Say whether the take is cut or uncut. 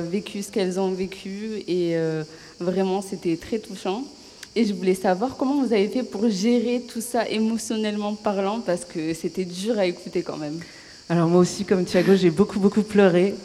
uncut